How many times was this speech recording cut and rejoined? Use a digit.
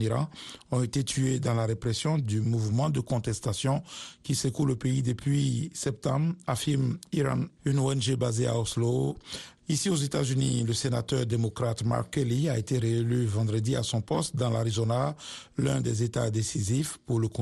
2